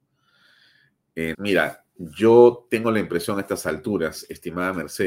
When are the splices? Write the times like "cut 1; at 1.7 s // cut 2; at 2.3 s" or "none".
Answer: cut 1; at 1.3 s